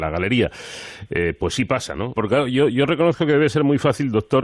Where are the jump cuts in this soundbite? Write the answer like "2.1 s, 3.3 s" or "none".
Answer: 2.2 s